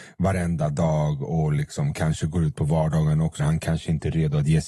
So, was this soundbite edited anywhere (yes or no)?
yes